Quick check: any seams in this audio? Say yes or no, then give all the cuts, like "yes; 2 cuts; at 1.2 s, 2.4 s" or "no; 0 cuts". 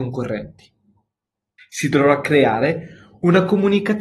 yes; 1 cut; at 1.6 s